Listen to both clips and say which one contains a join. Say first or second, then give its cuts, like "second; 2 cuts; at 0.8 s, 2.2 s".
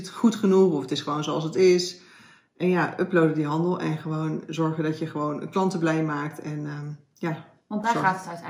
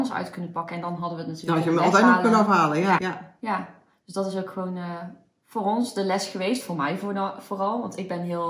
second; 1 cut; at 3.0 s